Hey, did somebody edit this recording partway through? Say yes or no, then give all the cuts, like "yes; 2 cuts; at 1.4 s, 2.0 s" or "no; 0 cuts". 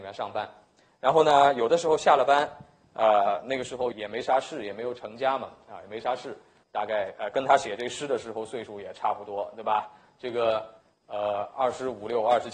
yes; 2 cuts; at 3.9 s, 6.6 s